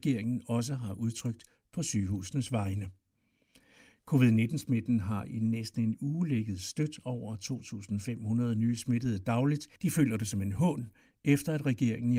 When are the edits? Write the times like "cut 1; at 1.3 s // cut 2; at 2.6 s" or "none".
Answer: cut 1; at 9.8 s

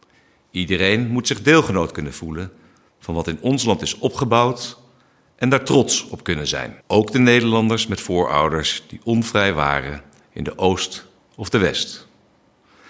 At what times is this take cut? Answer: cut 1; at 6.8 s

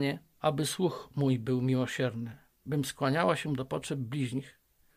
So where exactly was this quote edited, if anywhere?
none

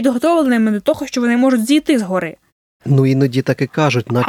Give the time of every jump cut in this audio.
cut 1; at 2.8 s

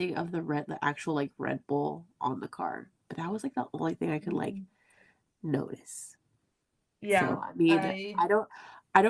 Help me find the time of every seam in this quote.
none

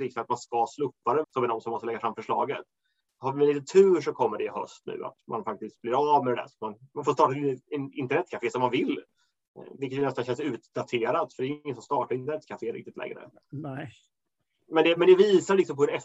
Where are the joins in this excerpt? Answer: cut 1; at 1.2 s

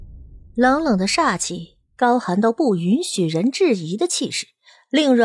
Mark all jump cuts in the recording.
none

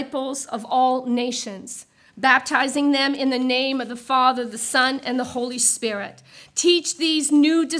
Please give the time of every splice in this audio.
none

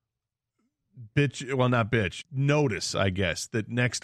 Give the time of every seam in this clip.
cut 1; at 2.2 s

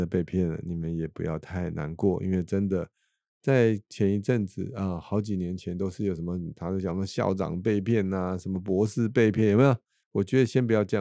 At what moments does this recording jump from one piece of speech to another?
cut 1; at 10.0 s

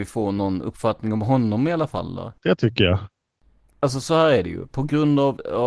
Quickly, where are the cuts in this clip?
none

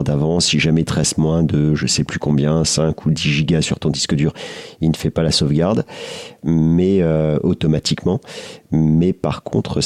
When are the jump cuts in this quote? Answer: none

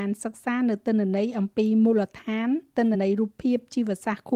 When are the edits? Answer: cut 1; at 2.9 s

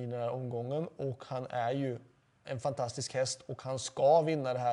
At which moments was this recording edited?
cut 1; at 2.4 s

